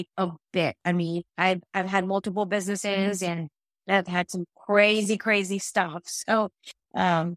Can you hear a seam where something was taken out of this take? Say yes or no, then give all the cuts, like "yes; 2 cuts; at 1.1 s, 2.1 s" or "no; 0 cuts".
yes; 1 cut; at 1.3 s